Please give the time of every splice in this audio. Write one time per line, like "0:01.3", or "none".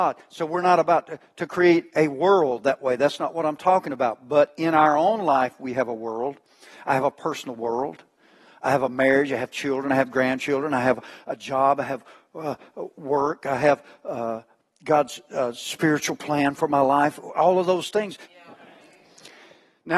0:18.2